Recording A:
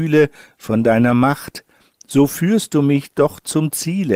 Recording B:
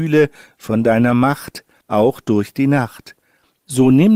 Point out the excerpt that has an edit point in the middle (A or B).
B